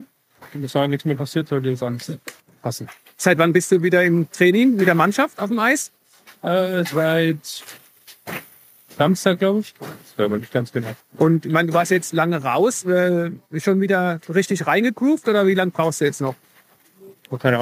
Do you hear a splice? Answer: no; 0 cuts

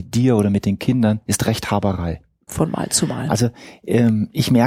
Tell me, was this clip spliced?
yes; 1 cut; at 2.5 s

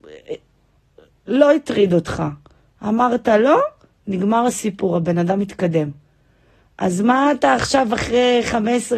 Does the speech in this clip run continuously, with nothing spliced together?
yes; 0 cuts

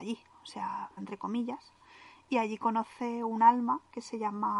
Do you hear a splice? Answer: yes; 1 cut; at 1.0 s

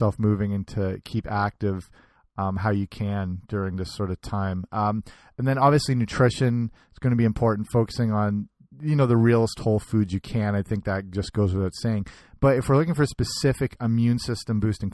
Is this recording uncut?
yes; 0 cuts

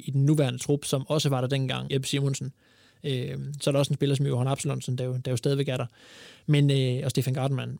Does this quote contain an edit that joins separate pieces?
yes; 1 cut; at 1.9 s

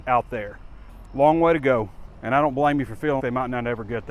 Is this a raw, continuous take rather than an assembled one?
no; 1 cut; at 3.2 s

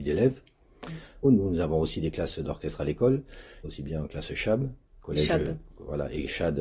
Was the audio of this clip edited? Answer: yes; 2 cuts; at 1.2 s, 3.6 s

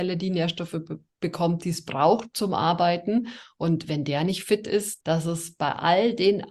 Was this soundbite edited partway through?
yes; 1 cut; at 5.0 s

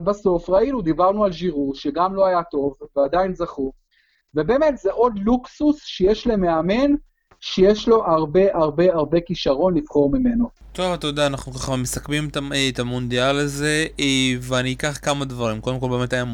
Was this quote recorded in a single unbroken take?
yes; 0 cuts

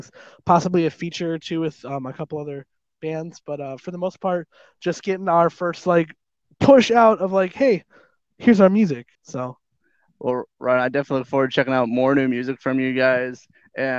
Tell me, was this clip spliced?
yes; 1 cut; at 9.2 s

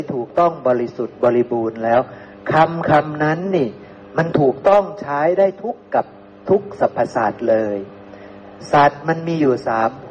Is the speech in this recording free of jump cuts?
yes; 0 cuts

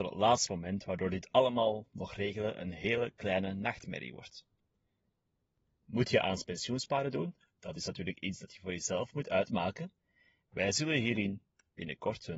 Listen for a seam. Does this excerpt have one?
no; 0 cuts

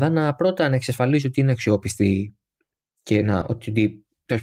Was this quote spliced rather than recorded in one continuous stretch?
no; 0 cuts

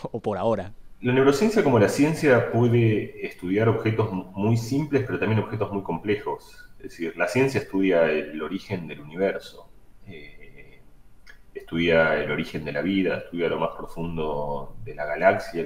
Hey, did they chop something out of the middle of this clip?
no; 0 cuts

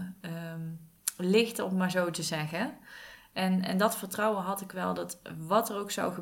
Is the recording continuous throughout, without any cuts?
yes; 0 cuts

